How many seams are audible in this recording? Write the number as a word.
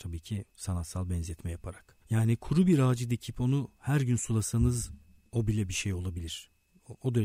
one